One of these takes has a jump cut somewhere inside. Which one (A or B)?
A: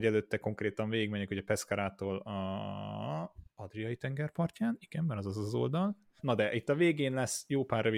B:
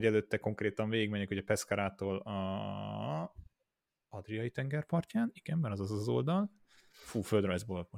A